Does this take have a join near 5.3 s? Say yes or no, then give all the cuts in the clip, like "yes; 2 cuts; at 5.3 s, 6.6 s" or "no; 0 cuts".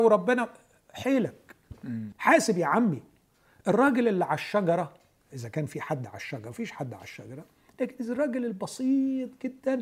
no; 1 cut; at 2.1 s